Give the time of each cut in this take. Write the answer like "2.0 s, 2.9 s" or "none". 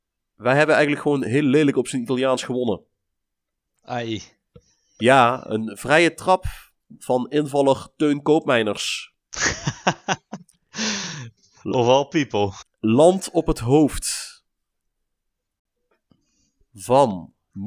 none